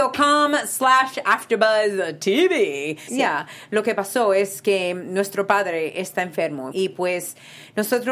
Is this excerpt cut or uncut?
cut